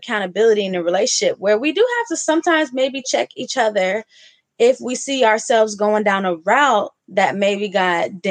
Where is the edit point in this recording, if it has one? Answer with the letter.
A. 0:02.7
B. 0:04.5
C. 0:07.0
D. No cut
C